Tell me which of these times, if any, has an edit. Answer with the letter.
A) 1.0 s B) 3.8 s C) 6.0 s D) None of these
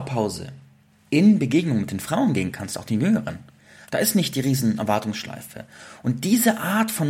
B